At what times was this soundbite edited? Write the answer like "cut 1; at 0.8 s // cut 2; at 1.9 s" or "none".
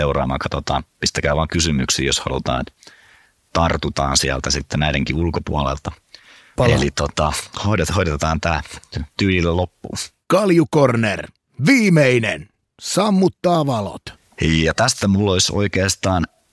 cut 1; at 6.6 s